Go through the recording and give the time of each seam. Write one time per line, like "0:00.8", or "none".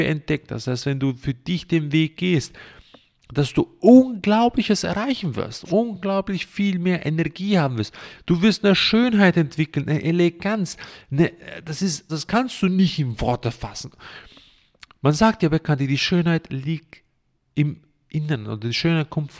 0:12.1